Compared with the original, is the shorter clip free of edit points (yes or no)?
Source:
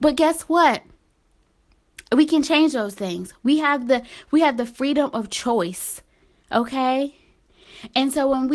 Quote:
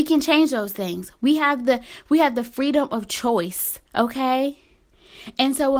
no